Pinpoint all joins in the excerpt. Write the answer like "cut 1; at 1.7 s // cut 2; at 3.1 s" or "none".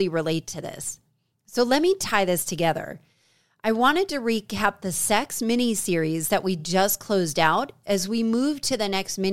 none